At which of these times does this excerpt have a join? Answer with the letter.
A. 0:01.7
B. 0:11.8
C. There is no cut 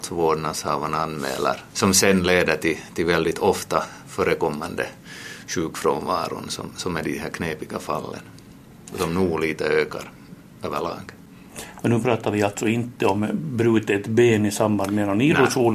A